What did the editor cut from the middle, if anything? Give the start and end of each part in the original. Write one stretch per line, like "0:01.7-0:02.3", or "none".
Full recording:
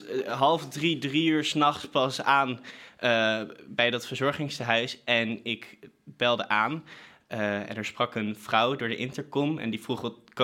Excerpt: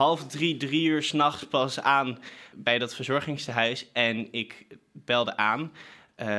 0:02.9-0:03.6